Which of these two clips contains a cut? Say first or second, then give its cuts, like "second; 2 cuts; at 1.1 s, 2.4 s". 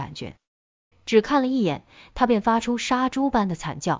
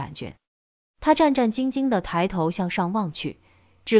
first; 1 cut; at 0.9 s